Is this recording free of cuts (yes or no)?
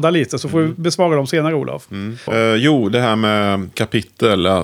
no